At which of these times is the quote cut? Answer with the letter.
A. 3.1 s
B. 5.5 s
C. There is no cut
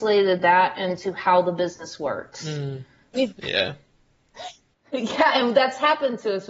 A